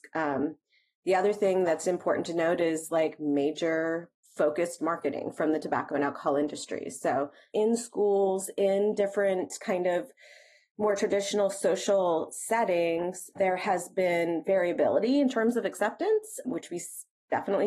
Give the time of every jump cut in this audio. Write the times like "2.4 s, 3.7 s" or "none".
7.5 s, 13.4 s, 16.4 s